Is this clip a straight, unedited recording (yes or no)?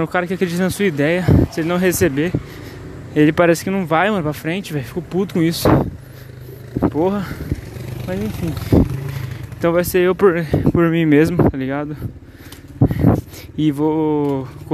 yes